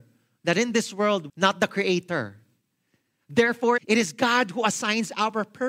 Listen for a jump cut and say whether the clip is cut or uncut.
cut